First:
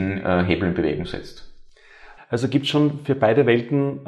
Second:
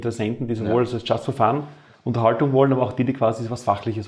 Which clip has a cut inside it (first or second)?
first